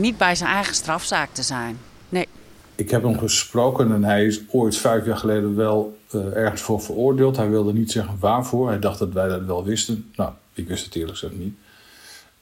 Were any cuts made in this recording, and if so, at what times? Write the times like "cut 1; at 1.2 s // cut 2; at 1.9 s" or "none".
none

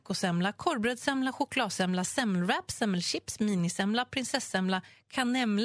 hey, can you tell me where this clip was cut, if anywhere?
none

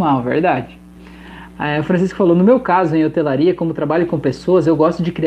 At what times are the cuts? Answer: none

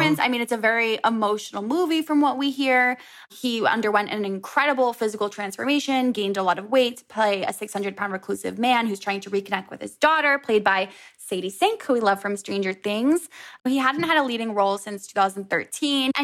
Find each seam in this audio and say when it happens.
cut 1; at 13.6 s

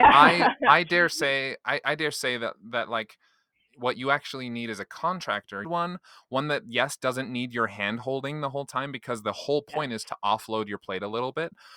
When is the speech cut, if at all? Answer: cut 1; at 5.6 s

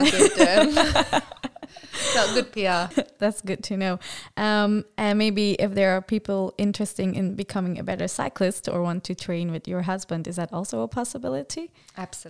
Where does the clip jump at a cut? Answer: cut 1; at 2.9 s

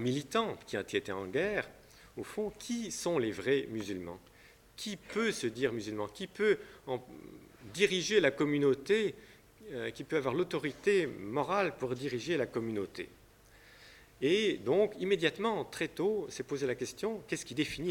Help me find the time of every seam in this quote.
none

